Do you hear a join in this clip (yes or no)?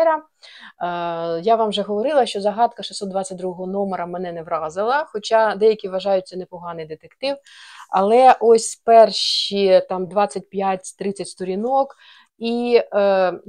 no